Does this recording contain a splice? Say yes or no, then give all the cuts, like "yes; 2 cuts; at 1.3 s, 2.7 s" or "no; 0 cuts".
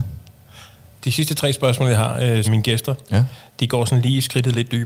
yes; 1 cut; at 2.4 s